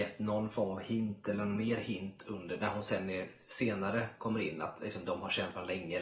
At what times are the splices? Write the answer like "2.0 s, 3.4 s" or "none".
none

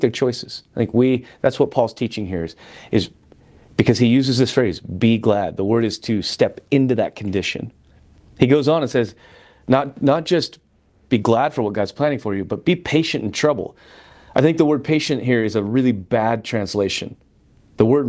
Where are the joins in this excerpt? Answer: none

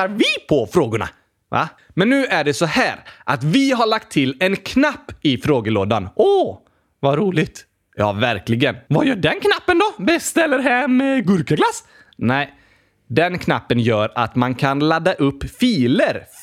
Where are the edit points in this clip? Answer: 1.8 s

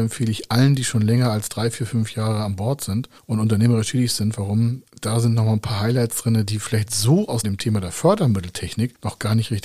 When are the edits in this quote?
7.4 s

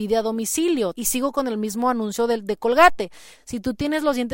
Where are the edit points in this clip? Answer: 0.9 s, 3.4 s

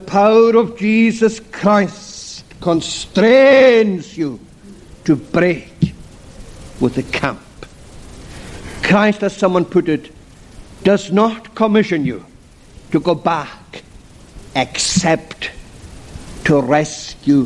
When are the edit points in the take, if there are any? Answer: none

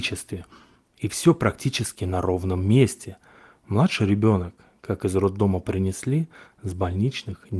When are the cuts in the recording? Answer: none

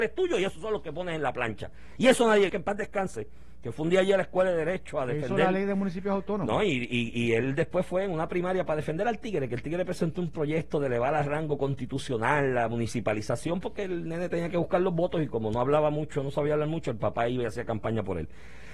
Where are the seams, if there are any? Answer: 2.5 s

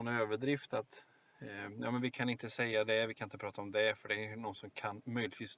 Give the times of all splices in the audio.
none

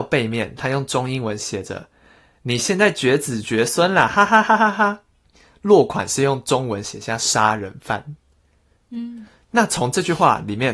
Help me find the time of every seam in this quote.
none

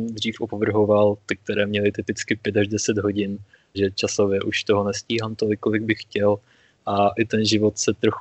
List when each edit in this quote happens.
3.7 s

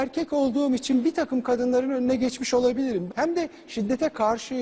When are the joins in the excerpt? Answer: 3.1 s

